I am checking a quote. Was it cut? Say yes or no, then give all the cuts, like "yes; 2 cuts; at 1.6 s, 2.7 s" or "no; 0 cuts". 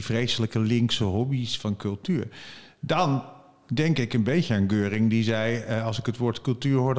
no; 0 cuts